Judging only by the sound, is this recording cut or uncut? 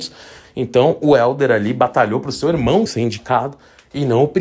cut